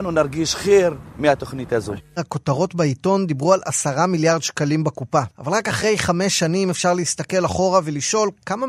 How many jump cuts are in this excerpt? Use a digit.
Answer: 1